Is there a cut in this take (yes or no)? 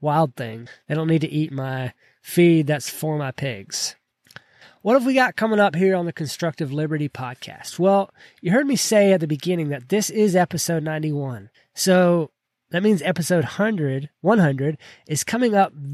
no